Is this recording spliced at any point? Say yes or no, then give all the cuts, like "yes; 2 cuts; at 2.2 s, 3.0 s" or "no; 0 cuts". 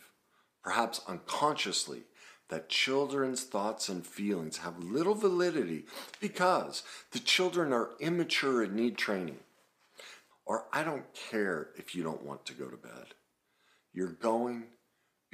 yes; 1 cut; at 10.3 s